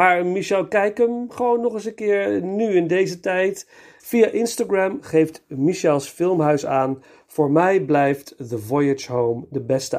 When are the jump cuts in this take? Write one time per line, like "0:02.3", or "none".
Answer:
0:04.0